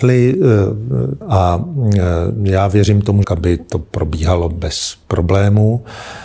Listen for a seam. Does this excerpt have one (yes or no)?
yes